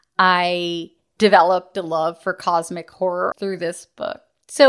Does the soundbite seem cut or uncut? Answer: cut